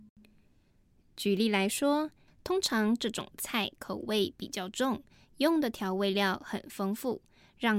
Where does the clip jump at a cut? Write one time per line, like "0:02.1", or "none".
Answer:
0:02.3